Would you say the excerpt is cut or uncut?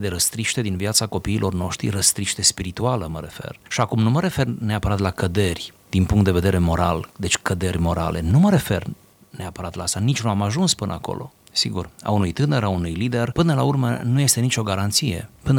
cut